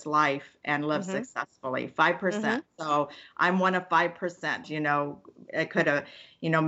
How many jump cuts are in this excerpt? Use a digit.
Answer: 1